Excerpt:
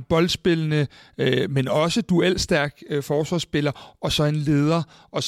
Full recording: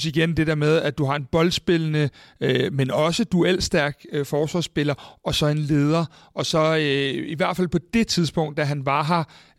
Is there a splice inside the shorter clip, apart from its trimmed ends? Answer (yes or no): no